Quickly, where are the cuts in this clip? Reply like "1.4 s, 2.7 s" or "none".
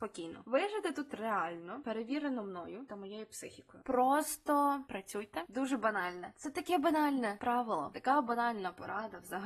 none